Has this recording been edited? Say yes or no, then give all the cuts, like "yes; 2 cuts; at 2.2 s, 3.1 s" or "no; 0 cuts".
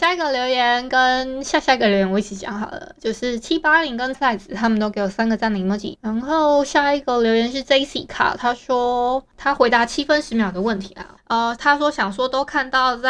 yes; 3 cuts; at 4.1 s, 5.9 s, 11.2 s